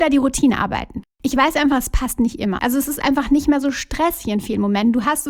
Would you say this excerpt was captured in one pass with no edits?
no; 2 cuts; at 1.0 s, 2.6 s

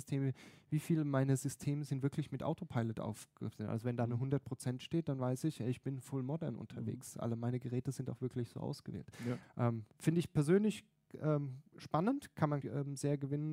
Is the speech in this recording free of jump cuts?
no; 2 cuts; at 9.4 s, 12.6 s

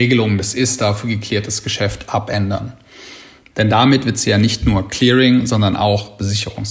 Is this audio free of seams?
no; 1 cut; at 3.5 s

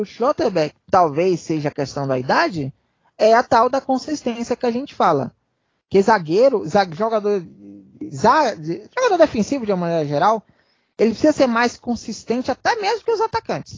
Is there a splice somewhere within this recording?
no; 0 cuts

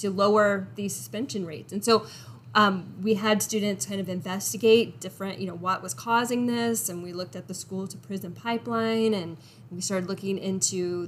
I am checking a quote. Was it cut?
no; 0 cuts

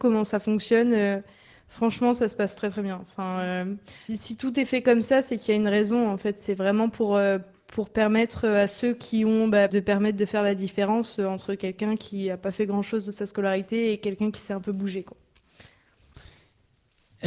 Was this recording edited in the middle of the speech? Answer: yes; 2 cuts; at 4.1 s, 9.7 s

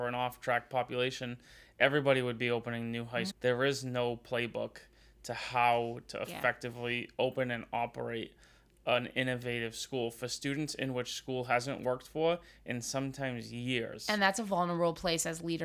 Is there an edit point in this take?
yes; 1 cut; at 3.3 s

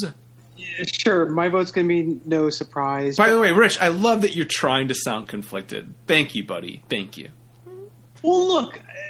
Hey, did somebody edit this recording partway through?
no; 0 cuts

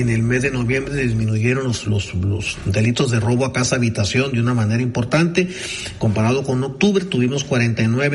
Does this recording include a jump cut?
yes; 1 cut; at 1.8 s

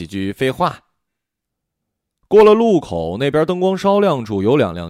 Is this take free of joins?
yes; 0 cuts

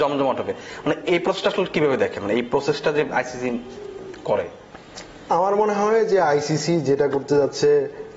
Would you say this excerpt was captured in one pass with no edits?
no; 1 cut; at 1.1 s

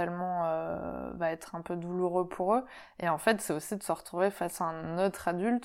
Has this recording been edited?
no; 0 cuts

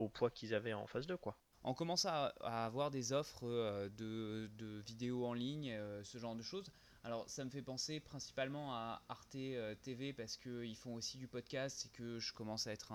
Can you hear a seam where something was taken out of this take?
yes; 1 cut; at 1.5 s

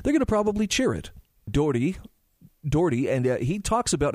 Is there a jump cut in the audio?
yes; 1 cut; at 1.5 s

